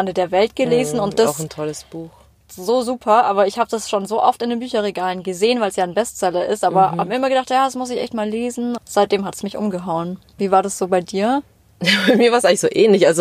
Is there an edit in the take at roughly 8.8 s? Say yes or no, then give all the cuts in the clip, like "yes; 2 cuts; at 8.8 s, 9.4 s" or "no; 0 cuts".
yes; 2 cuts; at 8.8 s, 10.4 s